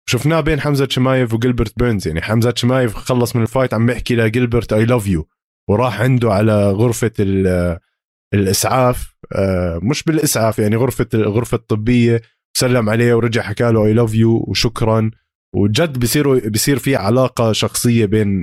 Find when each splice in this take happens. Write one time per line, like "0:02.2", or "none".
none